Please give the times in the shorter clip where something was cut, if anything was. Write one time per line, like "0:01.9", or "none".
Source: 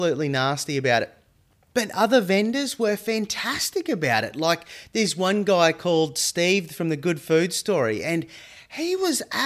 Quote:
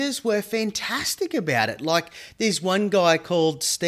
none